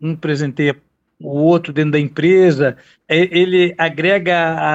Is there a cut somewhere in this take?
no; 0 cuts

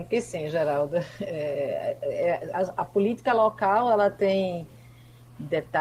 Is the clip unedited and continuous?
yes; 0 cuts

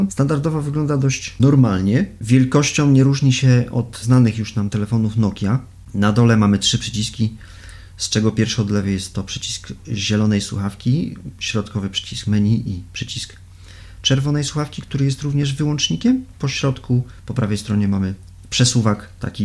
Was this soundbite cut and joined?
yes; 1 cut; at 16.3 s

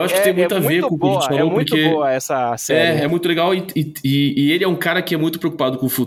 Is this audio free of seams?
yes; 0 cuts

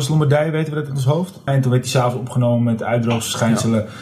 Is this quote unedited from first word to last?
no; 1 cut; at 1.5 s

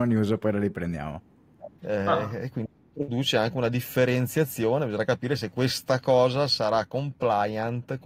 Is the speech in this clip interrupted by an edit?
yes; 1 cut; at 1.8 s

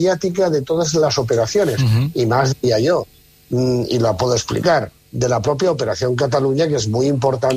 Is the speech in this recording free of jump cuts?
yes; 0 cuts

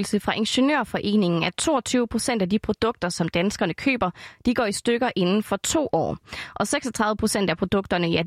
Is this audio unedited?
yes; 0 cuts

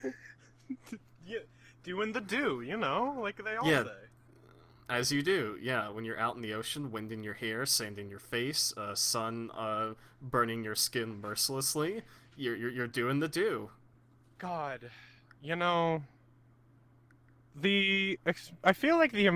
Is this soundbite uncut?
yes; 0 cuts

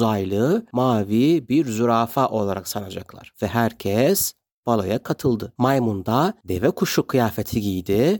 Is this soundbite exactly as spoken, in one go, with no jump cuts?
no; 2 cuts; at 3.3 s, 5.6 s

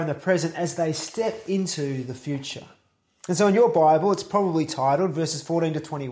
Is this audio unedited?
yes; 0 cuts

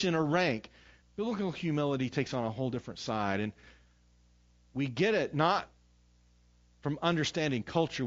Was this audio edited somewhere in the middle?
yes; 1 cut; at 1.0 s

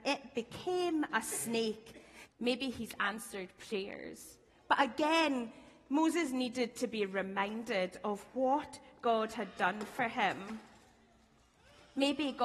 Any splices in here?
yes; 2 cuts; at 2.3 s, 4.5 s

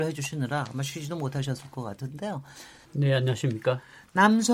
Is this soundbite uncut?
no; 1 cut; at 2.9 s

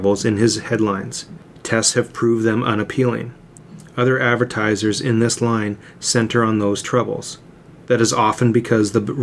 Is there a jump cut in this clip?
no; 0 cuts

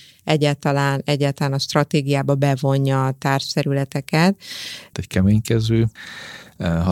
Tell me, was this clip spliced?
yes; 1 cut; at 4.9 s

